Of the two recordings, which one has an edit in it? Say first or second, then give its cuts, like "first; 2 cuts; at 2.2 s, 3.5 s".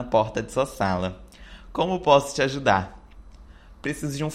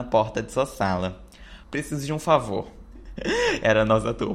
second; 2 cuts; at 1.6 s, 3.0 s